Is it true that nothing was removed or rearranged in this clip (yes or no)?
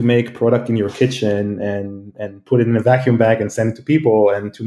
yes